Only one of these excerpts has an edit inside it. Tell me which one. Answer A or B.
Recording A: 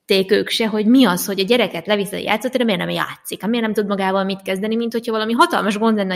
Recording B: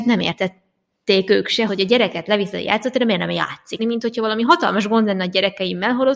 B